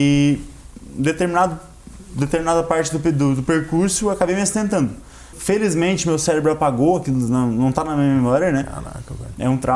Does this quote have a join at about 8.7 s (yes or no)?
no